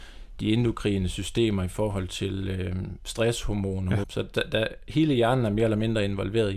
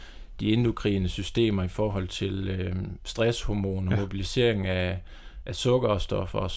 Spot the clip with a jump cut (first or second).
first